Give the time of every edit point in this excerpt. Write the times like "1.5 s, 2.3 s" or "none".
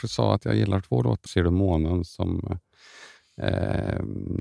1.3 s